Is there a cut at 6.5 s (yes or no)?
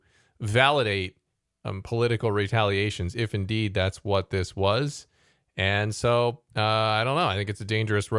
yes